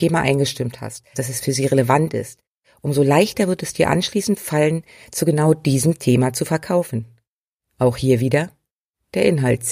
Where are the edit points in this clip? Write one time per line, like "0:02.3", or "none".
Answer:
0:01.1